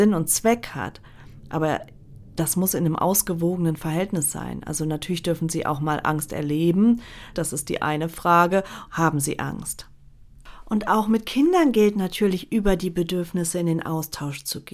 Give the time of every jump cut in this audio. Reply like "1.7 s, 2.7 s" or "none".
7.3 s, 8.9 s